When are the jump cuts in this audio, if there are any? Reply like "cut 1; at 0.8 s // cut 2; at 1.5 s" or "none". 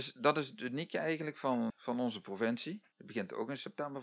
cut 1; at 1.7 s // cut 2; at 2.9 s